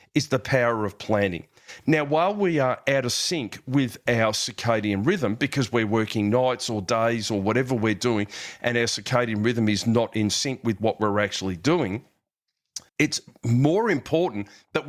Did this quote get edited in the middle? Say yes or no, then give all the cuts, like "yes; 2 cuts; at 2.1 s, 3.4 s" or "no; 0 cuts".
yes; 2 cuts; at 1.8 s, 12.9 s